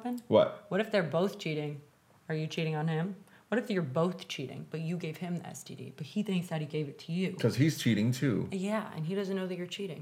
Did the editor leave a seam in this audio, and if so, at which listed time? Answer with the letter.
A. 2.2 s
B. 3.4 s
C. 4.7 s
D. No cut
D